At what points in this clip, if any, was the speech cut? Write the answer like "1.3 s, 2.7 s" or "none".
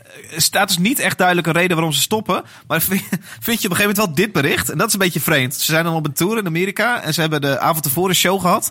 none